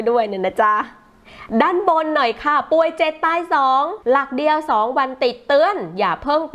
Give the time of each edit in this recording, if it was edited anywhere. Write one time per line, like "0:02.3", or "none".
0:04.0